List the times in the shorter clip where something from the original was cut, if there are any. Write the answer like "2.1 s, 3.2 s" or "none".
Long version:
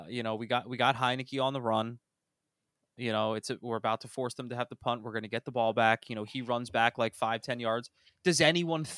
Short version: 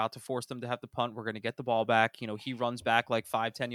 none